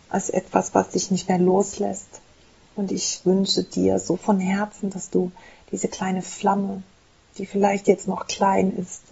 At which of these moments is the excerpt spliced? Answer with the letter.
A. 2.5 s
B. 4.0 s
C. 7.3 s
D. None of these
D